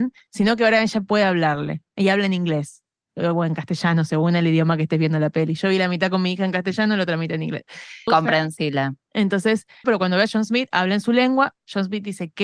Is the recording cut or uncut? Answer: cut